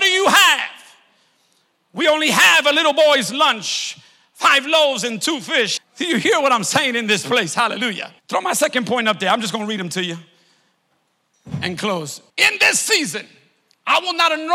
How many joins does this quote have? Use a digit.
3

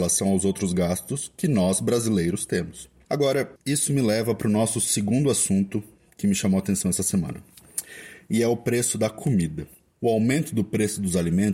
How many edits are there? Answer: 1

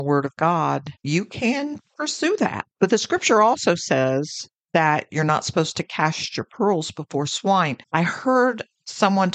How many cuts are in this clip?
1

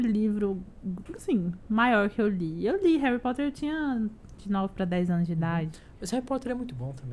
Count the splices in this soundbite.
1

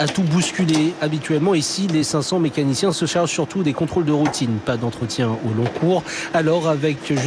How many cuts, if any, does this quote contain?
0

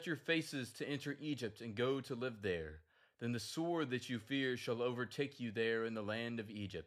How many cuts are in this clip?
0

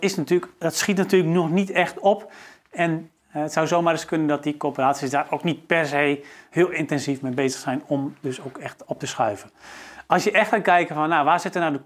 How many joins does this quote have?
1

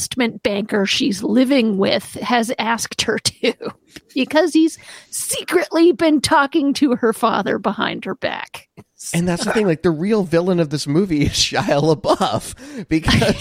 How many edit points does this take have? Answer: 0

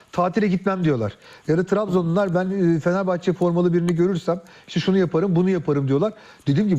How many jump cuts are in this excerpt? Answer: 0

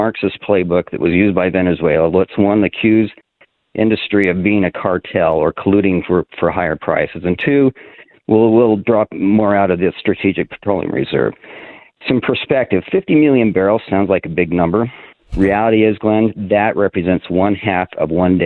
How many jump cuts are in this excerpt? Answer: 0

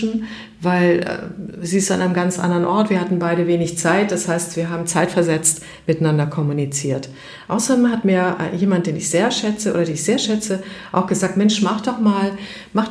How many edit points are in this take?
0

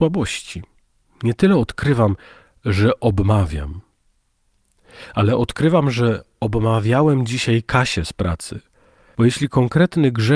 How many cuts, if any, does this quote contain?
1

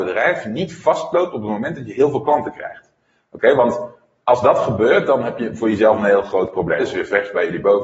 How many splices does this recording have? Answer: 1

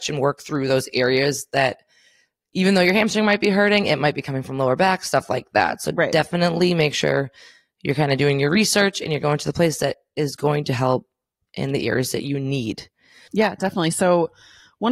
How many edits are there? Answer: 1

